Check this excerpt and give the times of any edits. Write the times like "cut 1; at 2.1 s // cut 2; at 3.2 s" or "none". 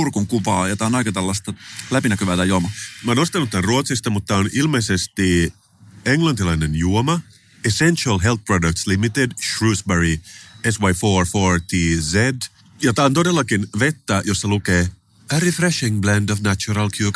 none